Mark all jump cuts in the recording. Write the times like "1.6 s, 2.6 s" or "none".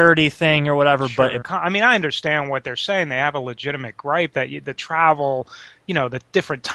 1.4 s